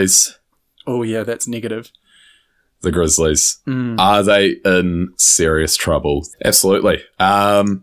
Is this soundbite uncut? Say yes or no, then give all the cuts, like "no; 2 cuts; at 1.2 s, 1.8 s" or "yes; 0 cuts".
no; 1 cut; at 6.3 s